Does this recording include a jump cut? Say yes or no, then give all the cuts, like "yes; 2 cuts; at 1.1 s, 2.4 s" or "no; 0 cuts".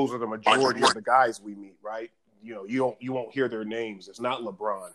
no; 0 cuts